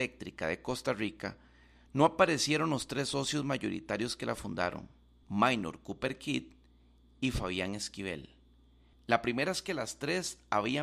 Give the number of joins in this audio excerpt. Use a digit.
2